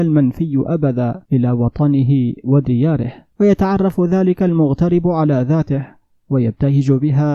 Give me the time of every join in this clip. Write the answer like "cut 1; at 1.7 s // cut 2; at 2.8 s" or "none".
cut 1; at 1.3 s // cut 2; at 3.3 s